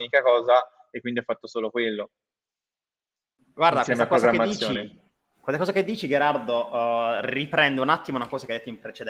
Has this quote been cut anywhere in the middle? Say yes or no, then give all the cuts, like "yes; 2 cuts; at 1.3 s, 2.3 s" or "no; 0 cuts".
no; 0 cuts